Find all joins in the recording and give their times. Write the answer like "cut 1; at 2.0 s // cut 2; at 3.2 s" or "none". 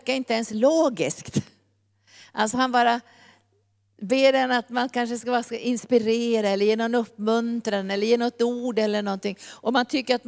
none